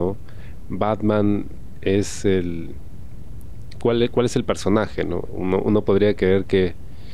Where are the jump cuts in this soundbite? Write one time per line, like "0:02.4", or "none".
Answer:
0:05.3